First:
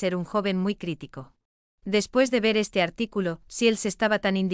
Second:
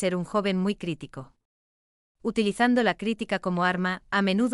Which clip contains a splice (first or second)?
first